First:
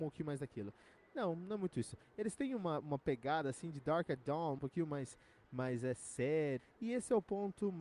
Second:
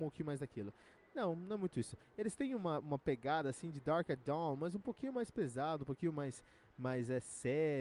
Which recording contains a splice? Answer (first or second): first